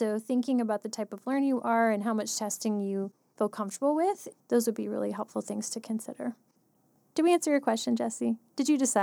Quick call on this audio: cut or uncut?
uncut